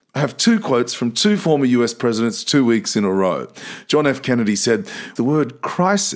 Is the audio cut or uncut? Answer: cut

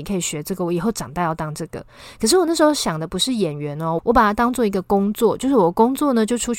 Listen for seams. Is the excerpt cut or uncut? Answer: cut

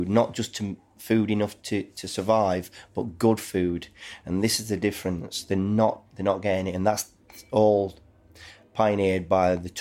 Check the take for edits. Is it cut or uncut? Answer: uncut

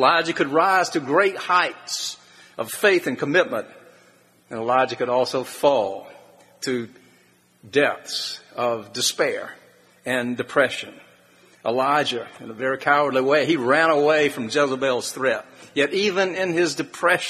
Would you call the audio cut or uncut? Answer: uncut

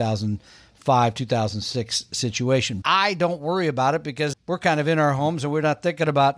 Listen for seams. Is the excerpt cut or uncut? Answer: cut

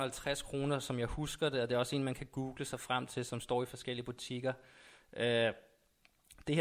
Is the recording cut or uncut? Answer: uncut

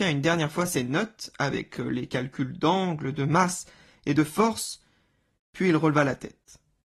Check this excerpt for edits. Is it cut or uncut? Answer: uncut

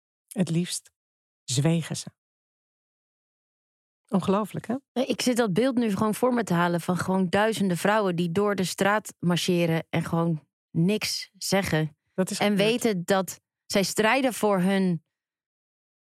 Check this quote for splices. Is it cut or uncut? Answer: uncut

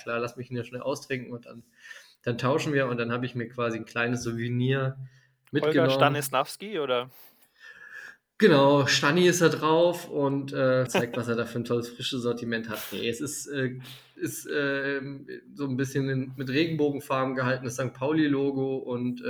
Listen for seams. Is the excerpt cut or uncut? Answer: cut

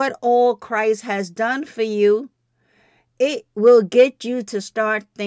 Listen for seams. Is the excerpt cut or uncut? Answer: uncut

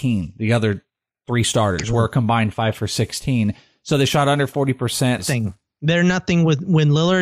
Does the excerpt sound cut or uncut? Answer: cut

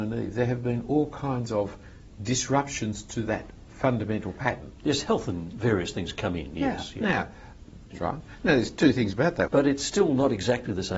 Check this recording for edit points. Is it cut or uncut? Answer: cut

